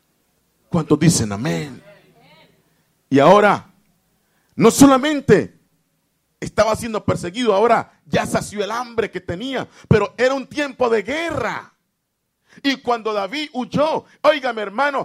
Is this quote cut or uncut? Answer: uncut